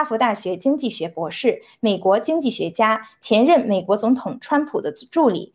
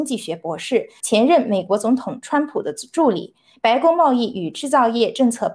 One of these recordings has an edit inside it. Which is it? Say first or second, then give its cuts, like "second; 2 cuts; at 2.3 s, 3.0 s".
second; 1 cut; at 1.0 s